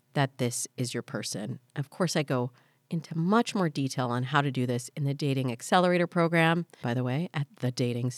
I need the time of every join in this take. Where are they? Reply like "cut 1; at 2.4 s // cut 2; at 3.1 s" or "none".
cut 1; at 6.8 s